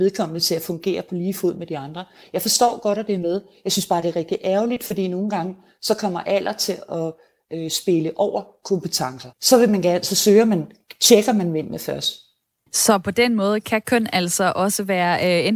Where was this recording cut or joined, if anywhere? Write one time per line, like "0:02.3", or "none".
0:09.3
0:12.7